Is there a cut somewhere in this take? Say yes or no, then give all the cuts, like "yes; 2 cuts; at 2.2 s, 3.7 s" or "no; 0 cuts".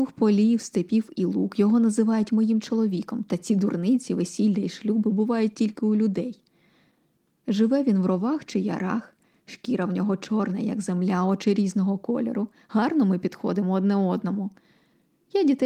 no; 0 cuts